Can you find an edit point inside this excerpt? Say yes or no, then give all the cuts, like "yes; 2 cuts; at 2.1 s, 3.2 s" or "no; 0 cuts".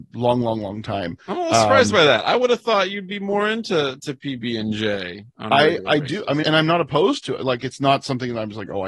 yes; 1 cut; at 6.4 s